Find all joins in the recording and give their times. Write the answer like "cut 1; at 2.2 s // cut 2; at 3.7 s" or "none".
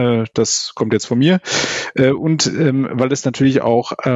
none